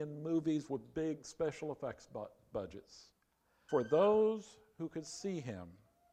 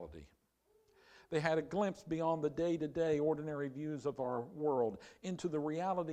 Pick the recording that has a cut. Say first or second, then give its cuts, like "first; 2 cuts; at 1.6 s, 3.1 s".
first; 1 cut; at 3.7 s